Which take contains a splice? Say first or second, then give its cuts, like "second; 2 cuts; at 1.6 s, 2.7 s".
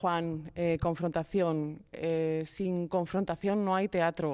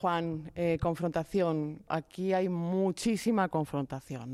second; 1 cut; at 1.9 s